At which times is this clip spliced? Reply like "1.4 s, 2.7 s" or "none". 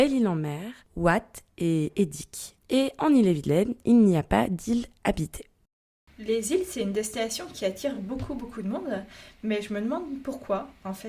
none